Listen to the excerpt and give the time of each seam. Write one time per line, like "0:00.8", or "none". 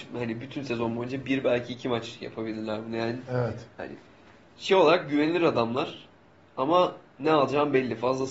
none